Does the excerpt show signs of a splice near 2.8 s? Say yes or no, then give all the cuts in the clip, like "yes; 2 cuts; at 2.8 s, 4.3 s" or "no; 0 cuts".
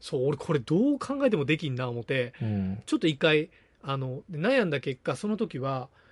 no; 1 cut; at 4.2 s